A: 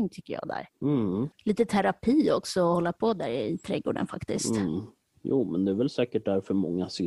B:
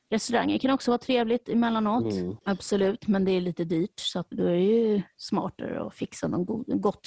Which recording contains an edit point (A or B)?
B